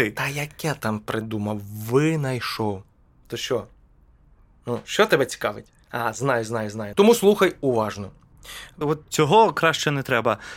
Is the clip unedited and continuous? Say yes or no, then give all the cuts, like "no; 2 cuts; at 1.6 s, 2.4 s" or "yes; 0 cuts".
no; 3 cuts; at 3.1 s, 6.9 s, 8.8 s